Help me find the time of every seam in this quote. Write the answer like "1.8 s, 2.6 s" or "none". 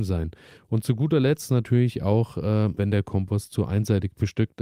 2.8 s